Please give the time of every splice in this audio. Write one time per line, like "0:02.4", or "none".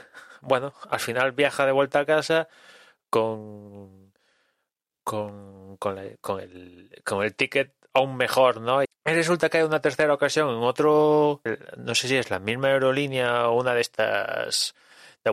0:08.9
0:11.5